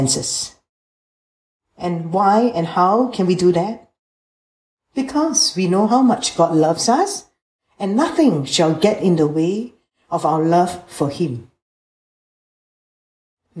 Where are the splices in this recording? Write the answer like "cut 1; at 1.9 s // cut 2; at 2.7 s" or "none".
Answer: none